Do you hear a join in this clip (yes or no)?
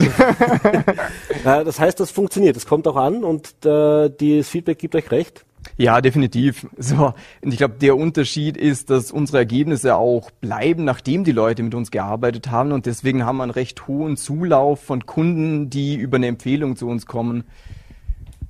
yes